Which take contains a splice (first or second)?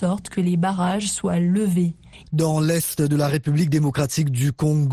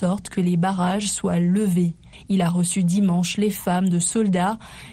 first